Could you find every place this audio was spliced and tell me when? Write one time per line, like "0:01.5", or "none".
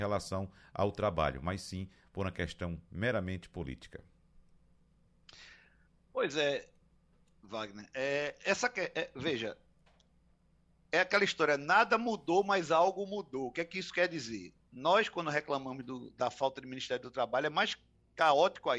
none